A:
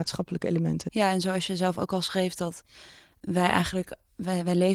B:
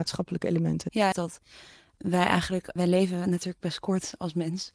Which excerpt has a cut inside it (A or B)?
B